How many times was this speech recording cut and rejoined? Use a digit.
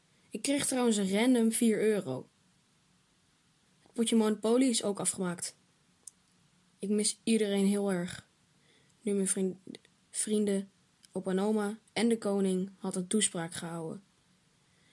2